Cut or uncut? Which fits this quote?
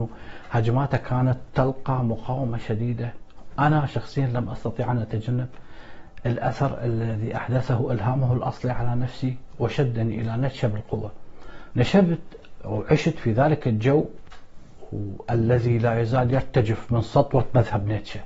cut